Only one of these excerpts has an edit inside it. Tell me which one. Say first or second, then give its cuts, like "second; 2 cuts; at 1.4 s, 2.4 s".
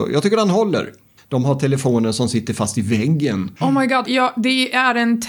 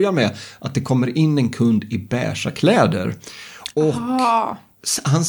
first; 2 cuts; at 1.2 s, 4.0 s